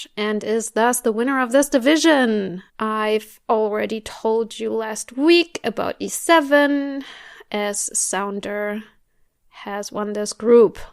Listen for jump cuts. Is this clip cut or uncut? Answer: cut